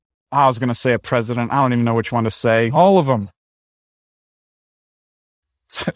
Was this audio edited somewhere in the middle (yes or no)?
no